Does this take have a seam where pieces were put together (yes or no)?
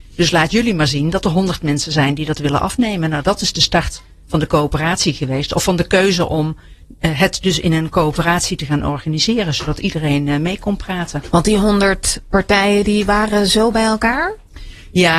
no